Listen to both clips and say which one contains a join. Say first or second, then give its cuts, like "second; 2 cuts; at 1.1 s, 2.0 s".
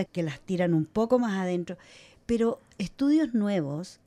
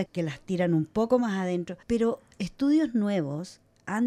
second; 1 cut; at 1.8 s